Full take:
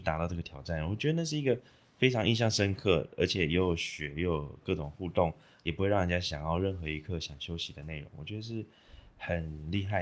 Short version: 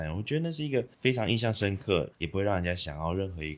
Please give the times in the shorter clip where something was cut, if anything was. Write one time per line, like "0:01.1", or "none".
0:00.9
0:02.1